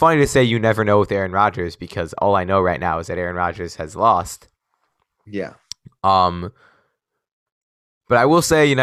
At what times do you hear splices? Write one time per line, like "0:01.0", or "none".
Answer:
none